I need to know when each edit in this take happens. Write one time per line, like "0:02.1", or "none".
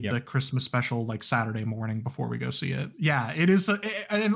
0:02.9

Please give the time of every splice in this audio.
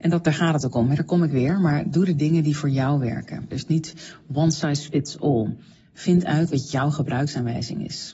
0:03.5

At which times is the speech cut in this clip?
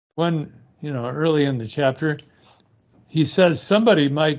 none

